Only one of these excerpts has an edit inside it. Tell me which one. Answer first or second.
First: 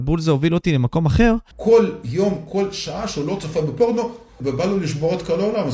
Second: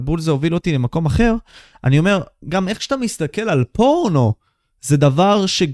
first